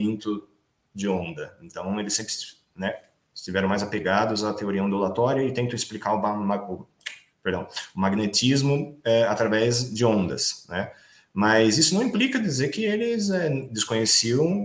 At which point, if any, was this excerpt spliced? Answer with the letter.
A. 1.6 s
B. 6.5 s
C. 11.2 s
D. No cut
D